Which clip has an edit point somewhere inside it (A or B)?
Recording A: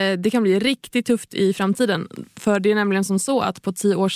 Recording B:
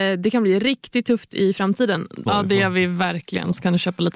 B